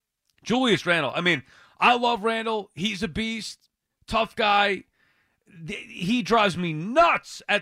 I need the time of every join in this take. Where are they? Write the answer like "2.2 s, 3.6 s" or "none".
none